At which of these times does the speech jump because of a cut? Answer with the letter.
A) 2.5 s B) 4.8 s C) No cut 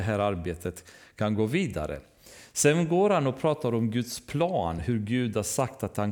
C